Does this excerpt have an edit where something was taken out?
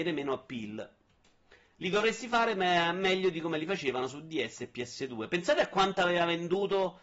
no; 0 cuts

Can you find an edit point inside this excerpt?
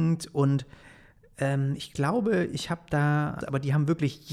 yes; 1 cut; at 3.4 s

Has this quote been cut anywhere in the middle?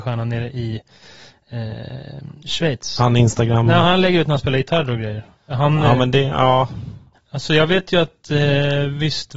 yes; 1 cut; at 7.1 s

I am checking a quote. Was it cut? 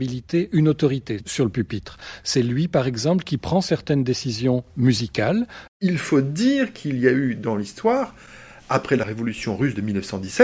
yes; 1 cut; at 5.7 s

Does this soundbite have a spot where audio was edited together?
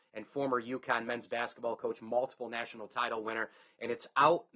no; 0 cuts

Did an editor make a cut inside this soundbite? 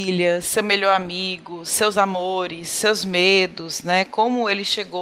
no; 0 cuts

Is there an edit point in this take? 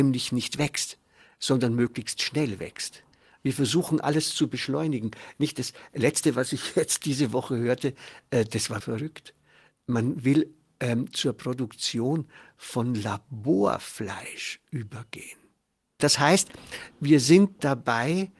yes; 2 cuts; at 8.8 s, 16.0 s

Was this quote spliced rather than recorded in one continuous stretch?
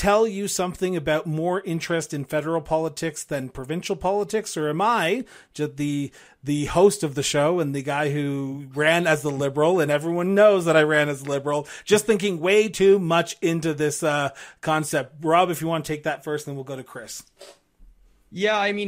no; 0 cuts

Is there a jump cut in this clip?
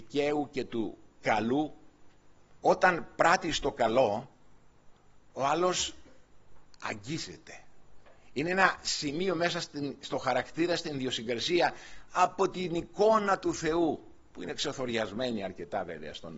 yes; 1 cut; at 2.6 s

